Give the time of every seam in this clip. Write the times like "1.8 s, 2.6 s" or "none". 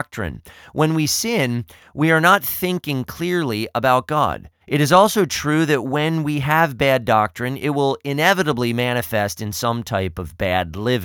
4.6 s